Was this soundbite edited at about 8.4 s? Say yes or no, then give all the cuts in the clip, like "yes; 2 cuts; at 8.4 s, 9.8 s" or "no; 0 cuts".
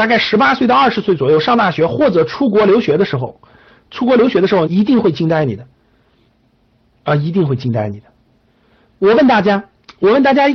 no; 1 cut; at 4.7 s